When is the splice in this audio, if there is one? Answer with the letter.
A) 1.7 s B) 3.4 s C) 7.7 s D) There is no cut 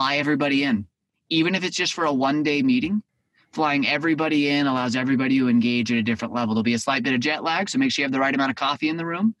D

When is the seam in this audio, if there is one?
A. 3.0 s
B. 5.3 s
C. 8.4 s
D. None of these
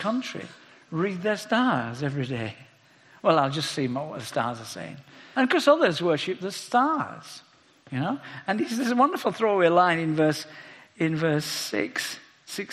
B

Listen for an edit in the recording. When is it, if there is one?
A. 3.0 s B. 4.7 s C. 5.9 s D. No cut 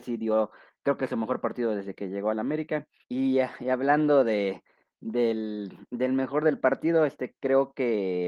A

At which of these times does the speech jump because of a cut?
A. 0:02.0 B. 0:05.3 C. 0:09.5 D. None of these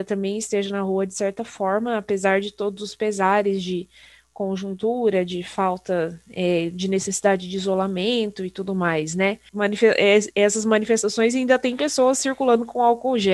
C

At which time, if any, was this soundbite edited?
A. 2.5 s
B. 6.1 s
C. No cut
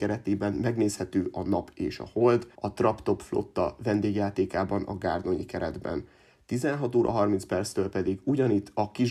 A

